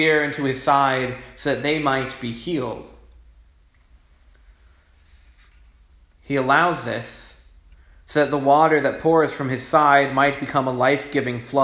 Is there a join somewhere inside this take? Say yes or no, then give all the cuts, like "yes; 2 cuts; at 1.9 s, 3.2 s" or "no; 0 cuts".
no; 0 cuts